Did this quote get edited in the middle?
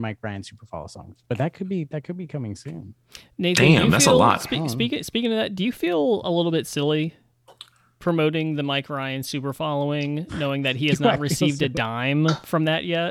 no; 0 cuts

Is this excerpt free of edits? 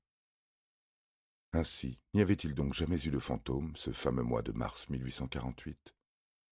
yes; 0 cuts

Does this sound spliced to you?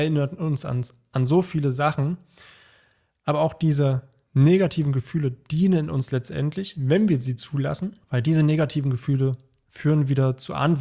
yes; 1 cut; at 8.0 s

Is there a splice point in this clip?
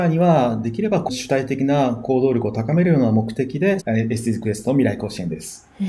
yes; 1 cut; at 3.8 s

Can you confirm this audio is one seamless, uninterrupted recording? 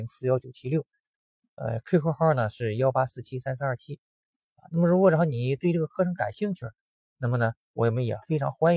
yes; 0 cuts

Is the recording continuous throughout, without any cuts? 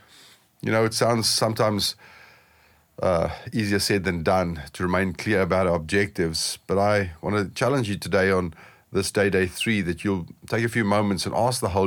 yes; 0 cuts

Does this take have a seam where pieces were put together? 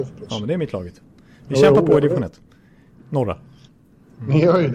no; 0 cuts

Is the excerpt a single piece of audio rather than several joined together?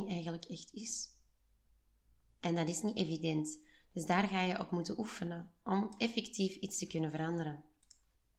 yes; 0 cuts

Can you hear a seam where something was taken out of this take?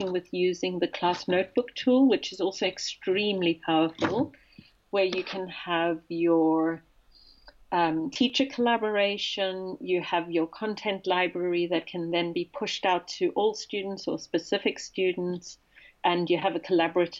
no; 0 cuts

